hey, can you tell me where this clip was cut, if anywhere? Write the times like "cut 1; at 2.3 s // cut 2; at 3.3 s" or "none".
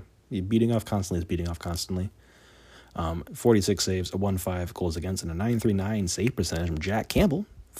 cut 1; at 3.3 s